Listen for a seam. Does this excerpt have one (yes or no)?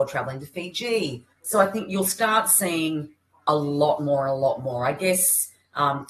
no